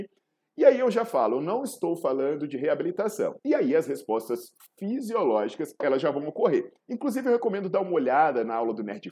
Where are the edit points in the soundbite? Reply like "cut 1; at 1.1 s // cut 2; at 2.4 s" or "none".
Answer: cut 1; at 3.4 s // cut 2; at 6.8 s